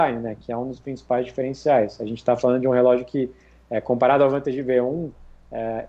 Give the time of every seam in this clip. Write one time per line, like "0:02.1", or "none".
none